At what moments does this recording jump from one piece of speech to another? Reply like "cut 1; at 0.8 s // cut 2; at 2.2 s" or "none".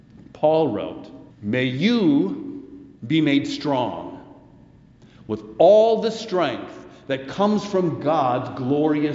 cut 1; at 1.3 s // cut 2; at 3.0 s